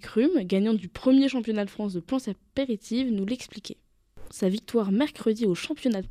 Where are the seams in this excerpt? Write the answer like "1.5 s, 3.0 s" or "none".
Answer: 4.3 s